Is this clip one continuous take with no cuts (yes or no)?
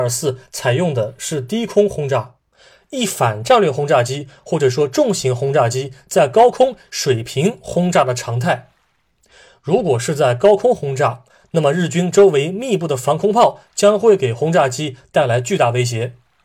yes